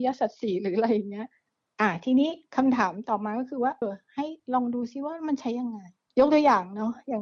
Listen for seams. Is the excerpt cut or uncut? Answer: cut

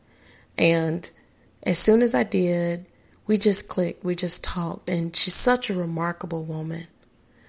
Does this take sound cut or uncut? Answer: uncut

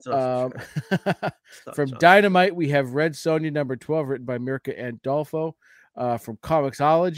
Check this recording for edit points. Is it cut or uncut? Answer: uncut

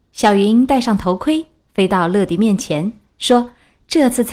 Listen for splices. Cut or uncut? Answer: cut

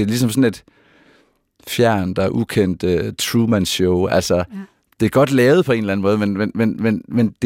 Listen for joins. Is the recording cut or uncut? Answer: uncut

